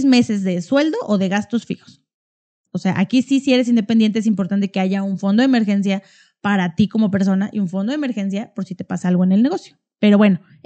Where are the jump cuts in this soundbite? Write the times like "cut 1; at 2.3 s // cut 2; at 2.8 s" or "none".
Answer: cut 1; at 2.7 s